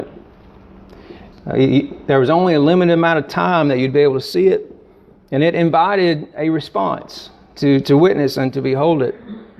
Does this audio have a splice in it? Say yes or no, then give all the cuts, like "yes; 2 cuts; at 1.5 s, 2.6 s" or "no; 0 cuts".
yes; 1 cut; at 1.3 s